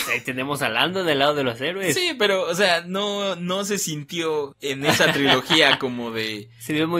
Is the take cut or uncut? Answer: uncut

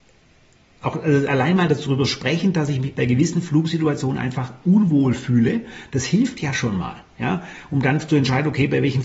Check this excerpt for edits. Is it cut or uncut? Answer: uncut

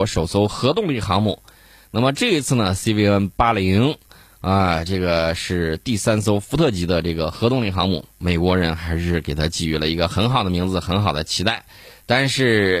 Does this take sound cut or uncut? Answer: uncut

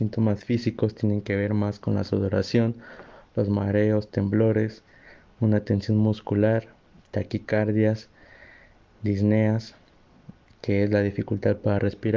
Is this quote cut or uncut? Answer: uncut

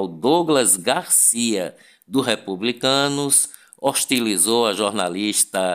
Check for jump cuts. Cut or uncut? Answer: uncut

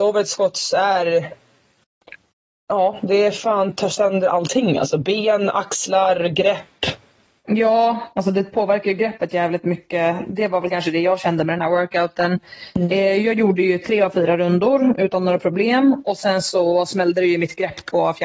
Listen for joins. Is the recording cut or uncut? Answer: uncut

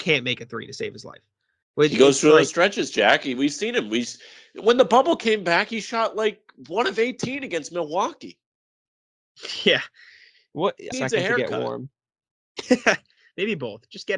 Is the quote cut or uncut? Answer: cut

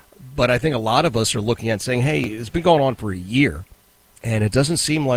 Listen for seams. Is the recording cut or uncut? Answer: uncut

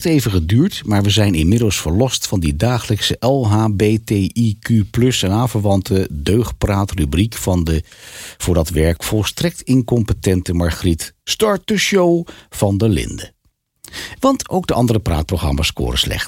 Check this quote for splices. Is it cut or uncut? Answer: cut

